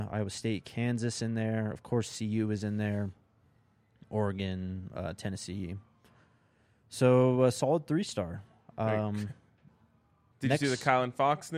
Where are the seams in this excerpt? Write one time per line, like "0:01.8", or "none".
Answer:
0:10.3